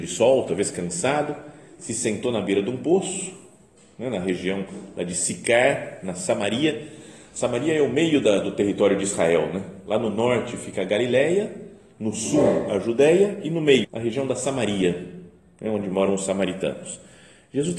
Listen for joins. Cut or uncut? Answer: cut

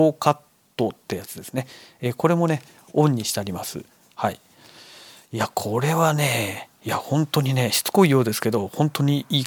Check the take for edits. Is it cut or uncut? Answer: uncut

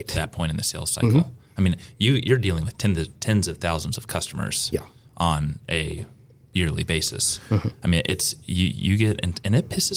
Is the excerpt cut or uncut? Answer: uncut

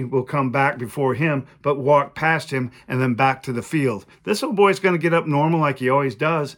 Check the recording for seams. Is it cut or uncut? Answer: cut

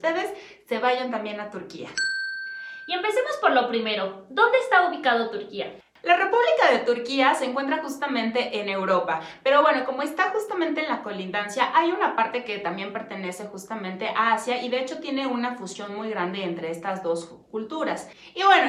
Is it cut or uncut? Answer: uncut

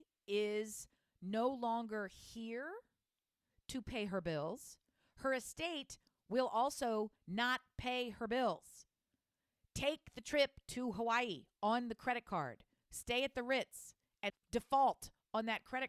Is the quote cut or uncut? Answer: cut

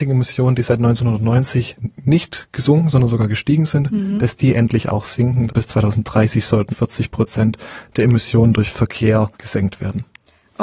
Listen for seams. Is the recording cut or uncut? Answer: cut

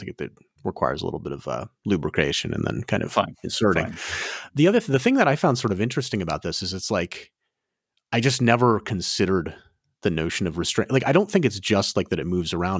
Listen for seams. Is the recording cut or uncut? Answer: uncut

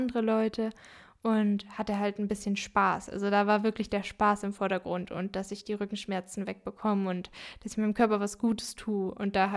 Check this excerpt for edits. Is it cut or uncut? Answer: uncut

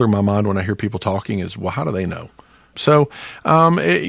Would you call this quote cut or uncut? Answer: cut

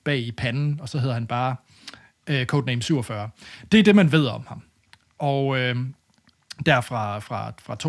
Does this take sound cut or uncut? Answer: uncut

